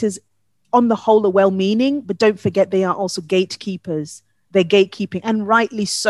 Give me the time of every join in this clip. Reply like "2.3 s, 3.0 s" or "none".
none

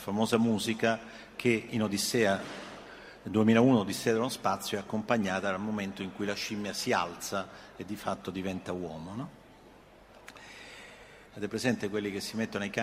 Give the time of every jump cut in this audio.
11.3 s

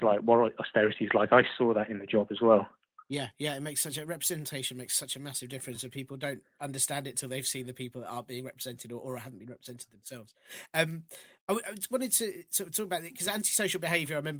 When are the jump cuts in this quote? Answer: none

